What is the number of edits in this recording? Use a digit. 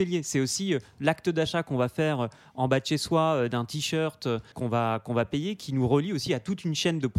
1